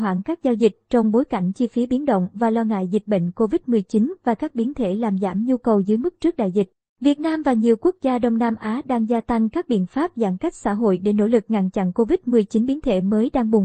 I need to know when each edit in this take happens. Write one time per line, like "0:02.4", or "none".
none